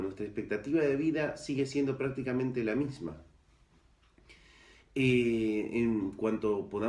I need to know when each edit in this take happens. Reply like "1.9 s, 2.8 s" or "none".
none